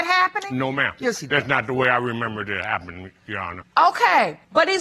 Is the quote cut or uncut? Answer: uncut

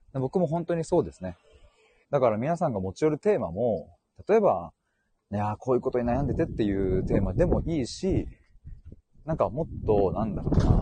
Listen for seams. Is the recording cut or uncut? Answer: cut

